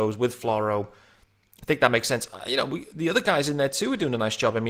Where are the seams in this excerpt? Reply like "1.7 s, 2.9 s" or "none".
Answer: none